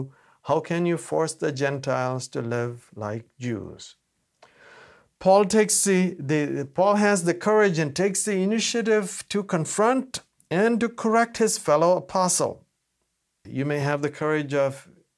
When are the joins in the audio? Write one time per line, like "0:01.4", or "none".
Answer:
0:13.5